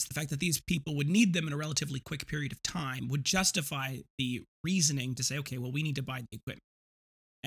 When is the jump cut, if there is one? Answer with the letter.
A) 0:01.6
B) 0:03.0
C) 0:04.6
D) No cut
D